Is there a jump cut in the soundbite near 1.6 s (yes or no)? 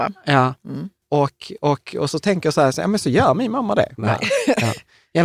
no